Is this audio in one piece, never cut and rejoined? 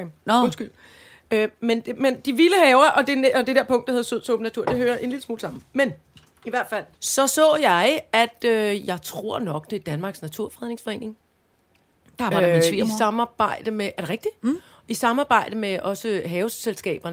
no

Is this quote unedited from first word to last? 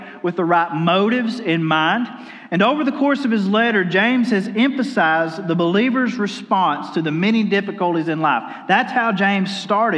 yes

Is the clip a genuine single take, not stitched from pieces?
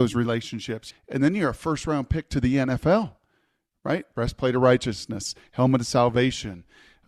no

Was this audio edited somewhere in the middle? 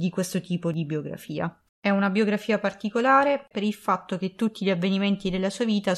yes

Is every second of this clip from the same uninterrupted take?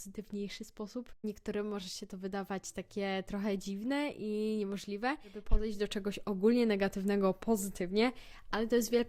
yes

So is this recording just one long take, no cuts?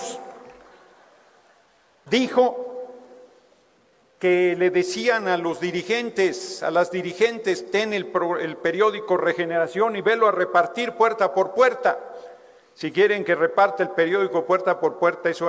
no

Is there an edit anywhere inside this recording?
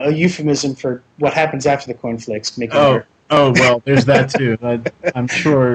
no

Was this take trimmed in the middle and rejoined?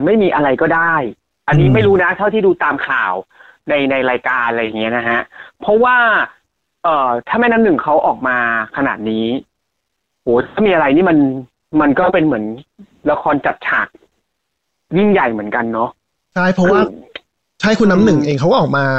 no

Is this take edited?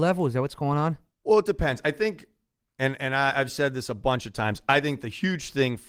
no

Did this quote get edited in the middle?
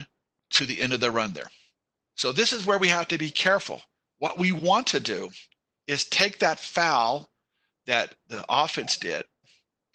yes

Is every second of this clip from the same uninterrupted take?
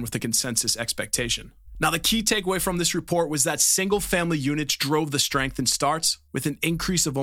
yes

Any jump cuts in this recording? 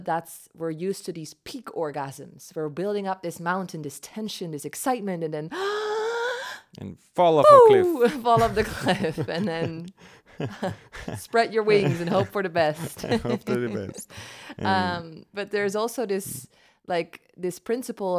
no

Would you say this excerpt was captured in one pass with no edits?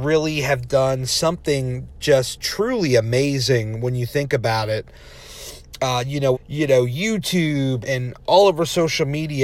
no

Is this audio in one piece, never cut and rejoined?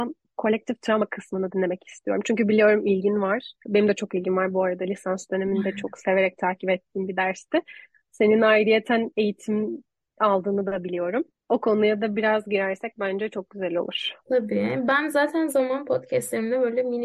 no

